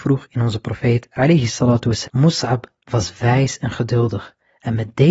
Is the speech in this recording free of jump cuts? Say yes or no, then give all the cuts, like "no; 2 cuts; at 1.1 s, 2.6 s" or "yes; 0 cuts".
no; 1 cut; at 2.0 s